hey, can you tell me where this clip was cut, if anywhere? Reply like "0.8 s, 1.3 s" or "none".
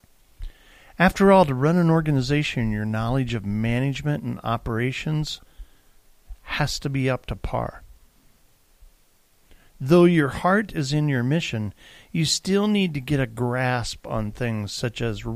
none